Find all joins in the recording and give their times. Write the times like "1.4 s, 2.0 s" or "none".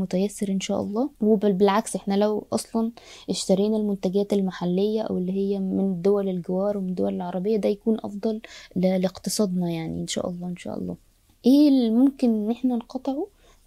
1.1 s